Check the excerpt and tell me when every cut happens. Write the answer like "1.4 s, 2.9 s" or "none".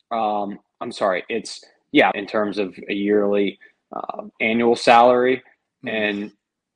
2.1 s, 4.3 s